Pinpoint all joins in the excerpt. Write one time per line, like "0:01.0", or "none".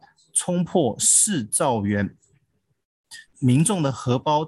0:03.3